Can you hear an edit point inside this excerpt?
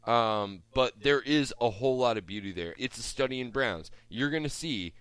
yes; 1 cut; at 2.8 s

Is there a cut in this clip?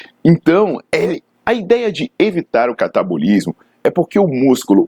yes; 1 cut; at 1.3 s

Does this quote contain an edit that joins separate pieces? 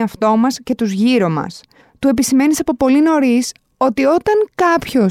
no; 0 cuts

